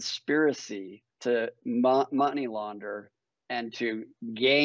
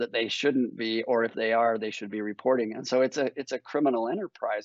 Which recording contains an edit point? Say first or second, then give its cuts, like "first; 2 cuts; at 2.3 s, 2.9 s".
first; 1 cut; at 1.1 s